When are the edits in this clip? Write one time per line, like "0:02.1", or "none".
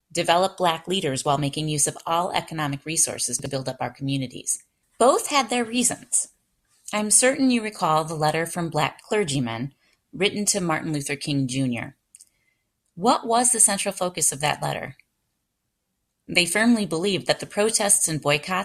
0:04.8